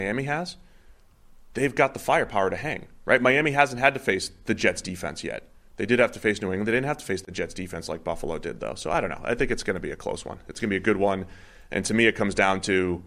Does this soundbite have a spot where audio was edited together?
no; 0 cuts

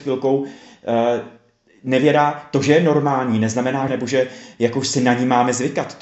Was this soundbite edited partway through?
yes; 1 cut; at 3.9 s

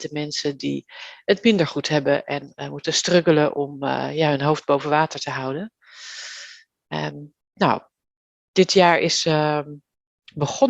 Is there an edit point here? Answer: yes; 1 cut; at 7.4 s

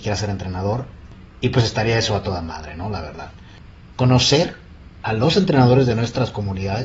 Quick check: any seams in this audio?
yes; 1 cut; at 3.9 s

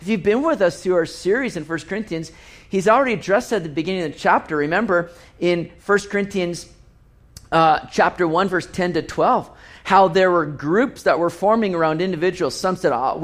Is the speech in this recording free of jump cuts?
yes; 0 cuts

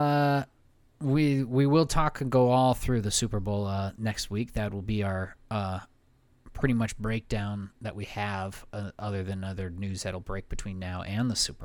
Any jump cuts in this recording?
no; 0 cuts

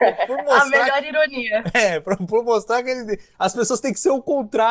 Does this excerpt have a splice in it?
no; 0 cuts

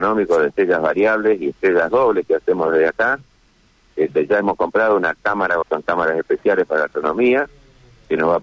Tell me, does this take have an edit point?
yes; 1 cut; at 5.6 s

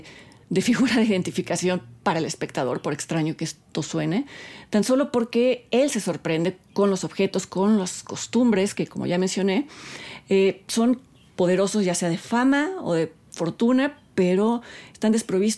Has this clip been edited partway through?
yes; 1 cut; at 8.7 s

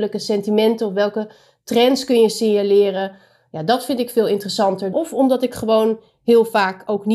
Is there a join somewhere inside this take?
yes; 1 cut; at 4.9 s

